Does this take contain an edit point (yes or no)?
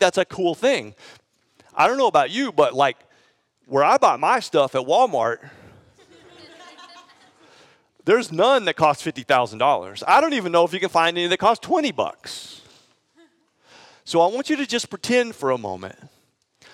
no